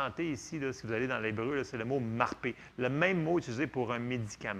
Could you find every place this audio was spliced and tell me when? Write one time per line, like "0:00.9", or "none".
none